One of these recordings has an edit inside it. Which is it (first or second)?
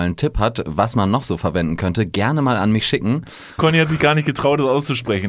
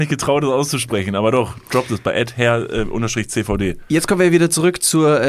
first